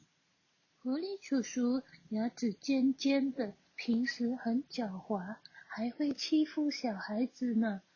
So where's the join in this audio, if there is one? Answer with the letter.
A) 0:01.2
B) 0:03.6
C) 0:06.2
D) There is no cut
D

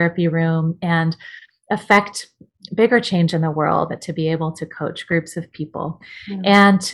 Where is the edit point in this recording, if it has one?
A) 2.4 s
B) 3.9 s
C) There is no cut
B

